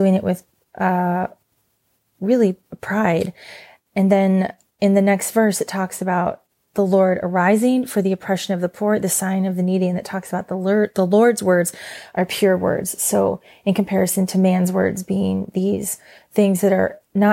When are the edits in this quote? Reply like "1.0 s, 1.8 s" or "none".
none